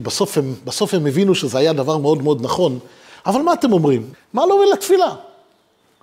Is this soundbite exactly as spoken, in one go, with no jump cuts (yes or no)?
no